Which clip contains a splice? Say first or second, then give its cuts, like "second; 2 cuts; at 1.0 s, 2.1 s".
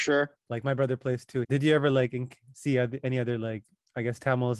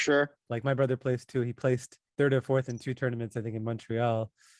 first; 1 cut; at 1.4 s